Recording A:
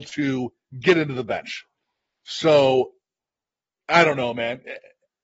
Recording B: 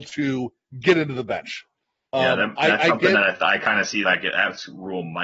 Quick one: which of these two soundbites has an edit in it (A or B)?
B